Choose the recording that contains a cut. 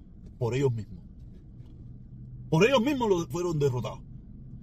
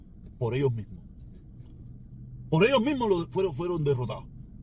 first; 1 cut; at 3.3 s

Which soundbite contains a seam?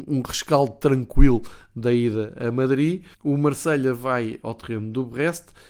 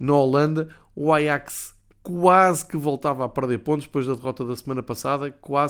first; 2 cuts; at 3.1 s, 4.4 s

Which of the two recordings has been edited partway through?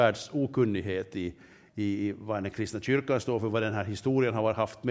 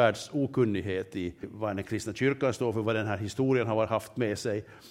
second; 1 cut; at 1.4 s

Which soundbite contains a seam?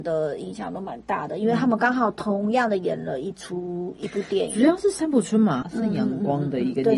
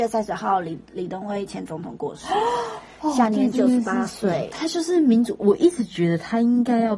first; 2 cuts; at 4.0 s, 5.6 s

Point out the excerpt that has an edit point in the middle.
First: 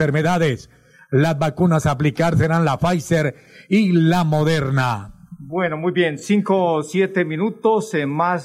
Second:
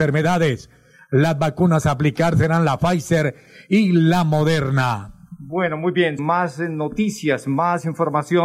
second; 1 cut; at 6.2 s

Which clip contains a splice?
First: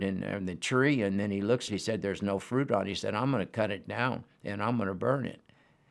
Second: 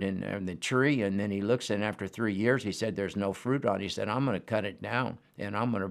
first; 1 cut; at 1.7 s

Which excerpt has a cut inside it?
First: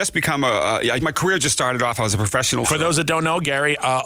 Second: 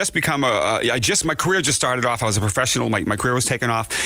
first; 2 cuts; at 1.0 s, 2.6 s

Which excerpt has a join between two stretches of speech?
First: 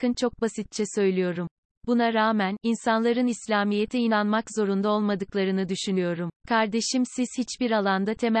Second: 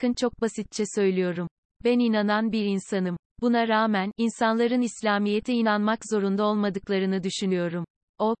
first; 2 cuts; at 1.7 s, 6.4 s

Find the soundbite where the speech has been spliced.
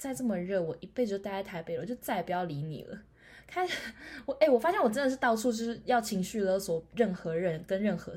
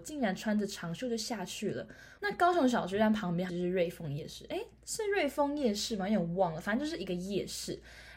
second; 2 cuts; at 2.2 s, 3.5 s

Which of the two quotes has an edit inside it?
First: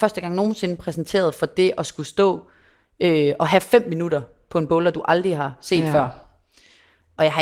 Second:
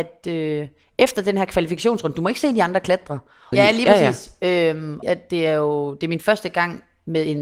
second; 2 cuts; at 3.5 s, 5.0 s

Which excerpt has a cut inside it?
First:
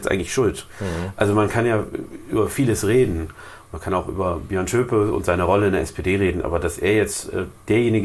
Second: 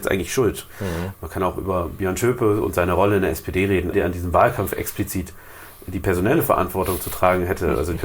second; 2 cuts; at 1.1 s, 3.9 s

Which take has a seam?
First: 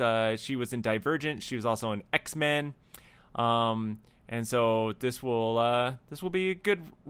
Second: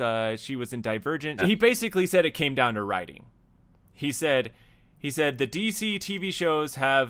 second; 1 cut; at 1.4 s

